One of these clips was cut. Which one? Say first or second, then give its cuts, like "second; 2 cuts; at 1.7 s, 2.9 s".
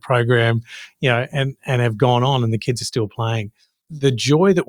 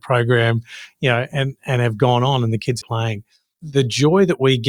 second; 1 cut; at 2.8 s